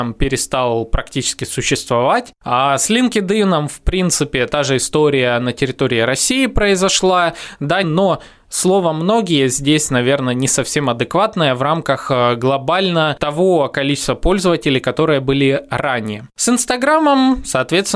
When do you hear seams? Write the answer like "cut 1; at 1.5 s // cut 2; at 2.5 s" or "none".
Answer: cut 1; at 2.4 s // cut 2; at 7.8 s